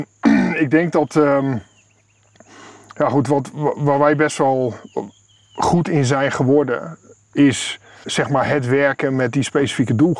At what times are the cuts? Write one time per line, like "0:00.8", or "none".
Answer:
0:08.0